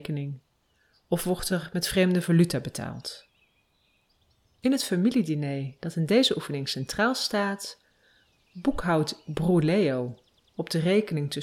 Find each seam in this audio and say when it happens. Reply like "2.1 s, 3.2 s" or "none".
none